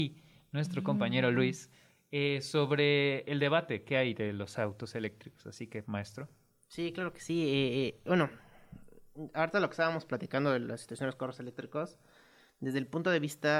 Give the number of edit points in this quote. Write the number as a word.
one